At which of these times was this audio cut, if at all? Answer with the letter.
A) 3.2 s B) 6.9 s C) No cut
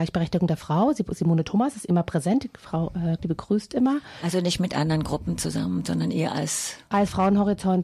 A